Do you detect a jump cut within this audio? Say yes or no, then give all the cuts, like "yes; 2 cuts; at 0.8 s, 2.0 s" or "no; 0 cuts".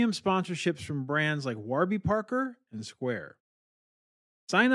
no; 0 cuts